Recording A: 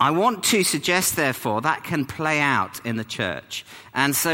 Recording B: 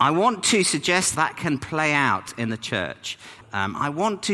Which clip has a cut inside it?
B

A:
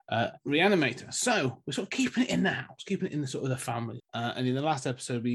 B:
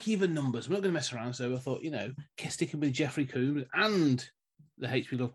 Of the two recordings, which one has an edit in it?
A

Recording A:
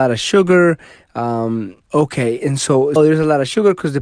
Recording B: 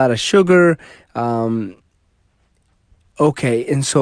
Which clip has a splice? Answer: A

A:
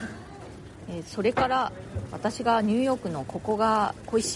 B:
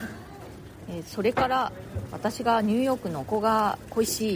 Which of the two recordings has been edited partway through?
B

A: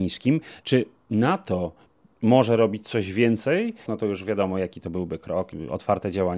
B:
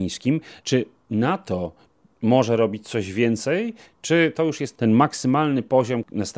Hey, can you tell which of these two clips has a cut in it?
A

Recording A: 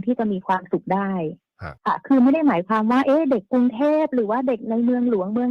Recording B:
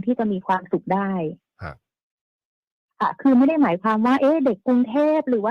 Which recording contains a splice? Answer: A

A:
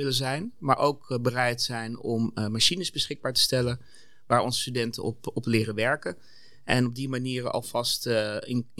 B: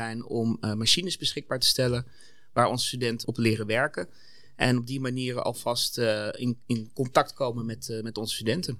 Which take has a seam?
B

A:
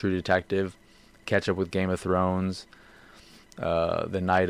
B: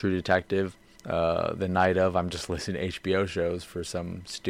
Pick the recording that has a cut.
B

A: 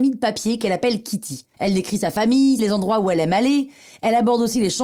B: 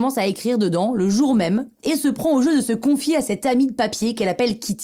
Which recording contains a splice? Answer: A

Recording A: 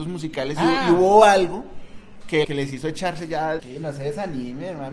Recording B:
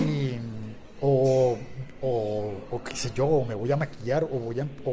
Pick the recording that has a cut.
A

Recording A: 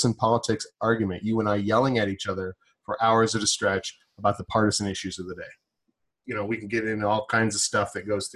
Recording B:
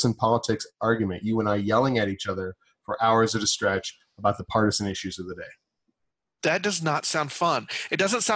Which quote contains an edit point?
A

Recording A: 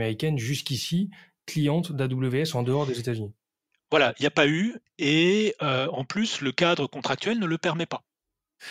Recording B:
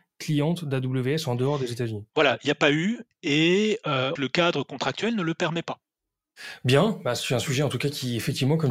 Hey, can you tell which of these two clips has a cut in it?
B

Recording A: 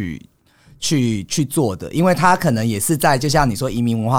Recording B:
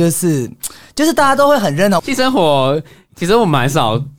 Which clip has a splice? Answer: B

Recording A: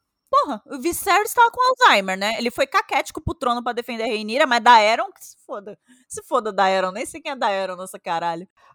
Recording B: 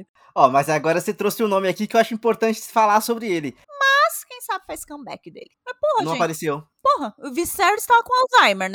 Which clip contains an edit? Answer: B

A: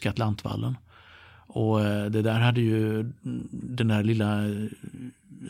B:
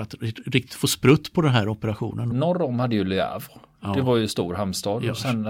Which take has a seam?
B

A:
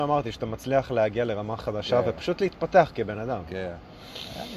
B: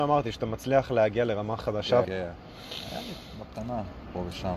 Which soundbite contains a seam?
B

